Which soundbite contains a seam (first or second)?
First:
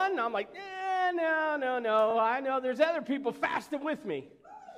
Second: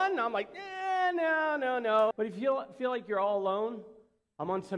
second